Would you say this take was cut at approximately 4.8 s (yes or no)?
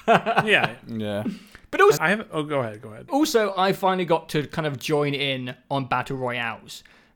no